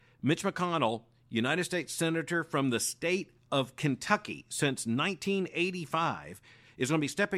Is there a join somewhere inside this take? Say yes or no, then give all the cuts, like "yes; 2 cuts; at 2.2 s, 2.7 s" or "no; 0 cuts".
no; 0 cuts